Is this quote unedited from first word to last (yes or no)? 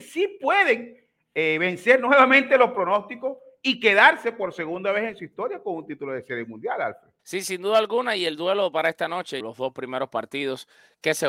no